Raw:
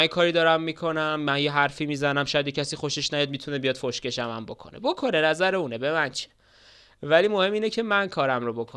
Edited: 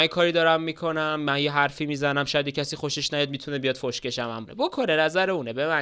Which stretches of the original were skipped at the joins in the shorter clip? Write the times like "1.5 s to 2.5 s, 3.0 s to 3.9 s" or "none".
4.5 s to 4.7 s